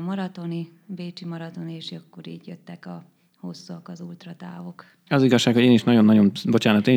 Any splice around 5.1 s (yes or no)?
yes